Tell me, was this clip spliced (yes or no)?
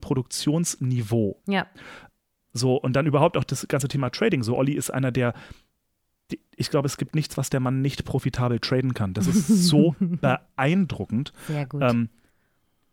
no